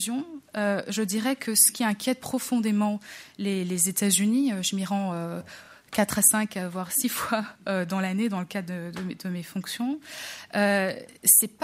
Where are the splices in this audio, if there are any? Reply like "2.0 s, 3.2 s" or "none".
none